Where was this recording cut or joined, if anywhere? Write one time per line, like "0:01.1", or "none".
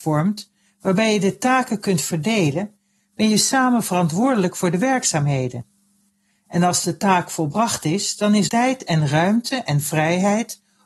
0:08.5

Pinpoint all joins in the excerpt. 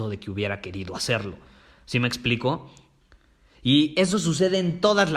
none

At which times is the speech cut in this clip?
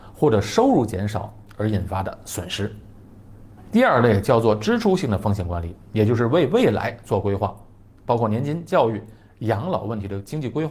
none

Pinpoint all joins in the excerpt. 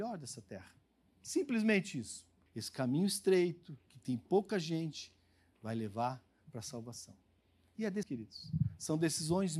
0:02.5
0:08.0

